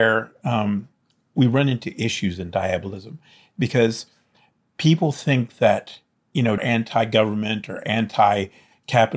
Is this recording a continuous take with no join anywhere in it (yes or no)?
no